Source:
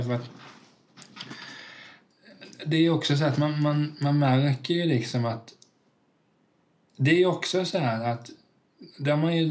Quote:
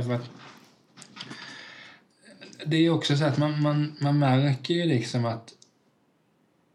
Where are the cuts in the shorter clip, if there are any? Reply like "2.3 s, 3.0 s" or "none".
none